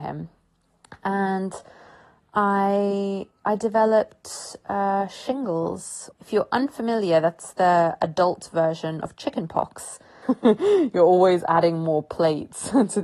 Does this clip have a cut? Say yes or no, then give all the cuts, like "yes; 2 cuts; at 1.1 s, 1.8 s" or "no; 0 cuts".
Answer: yes; 2 cuts; at 6.1 s, 10.2 s